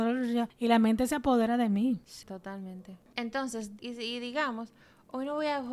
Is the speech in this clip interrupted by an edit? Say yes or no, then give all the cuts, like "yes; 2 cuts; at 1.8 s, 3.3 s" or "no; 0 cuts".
yes; 2 cuts; at 2.2 s, 3.8 s